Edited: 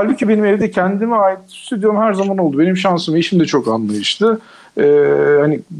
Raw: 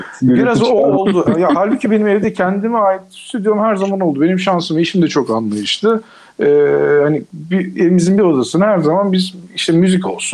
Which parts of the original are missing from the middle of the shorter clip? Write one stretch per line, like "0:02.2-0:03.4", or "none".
none